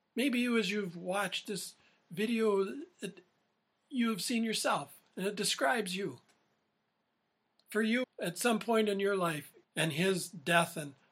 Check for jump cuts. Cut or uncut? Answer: cut